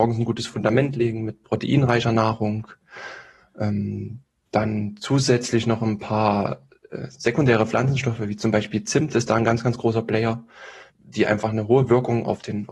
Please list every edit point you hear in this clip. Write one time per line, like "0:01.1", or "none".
0:10.9